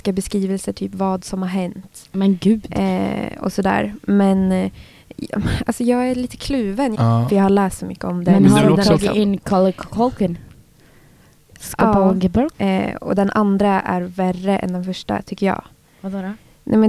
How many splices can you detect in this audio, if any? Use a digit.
2